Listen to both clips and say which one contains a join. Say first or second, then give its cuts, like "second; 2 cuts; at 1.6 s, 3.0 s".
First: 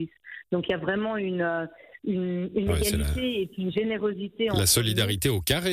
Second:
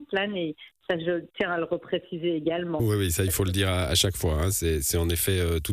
second; 1 cut; at 4.5 s